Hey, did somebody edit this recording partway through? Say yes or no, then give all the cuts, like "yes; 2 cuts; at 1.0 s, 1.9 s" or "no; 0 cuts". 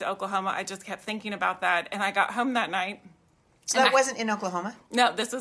no; 0 cuts